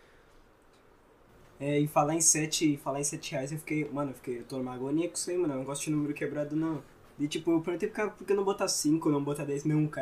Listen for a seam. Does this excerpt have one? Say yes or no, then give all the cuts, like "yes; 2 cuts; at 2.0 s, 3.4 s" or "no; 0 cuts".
yes; 1 cut; at 7.1 s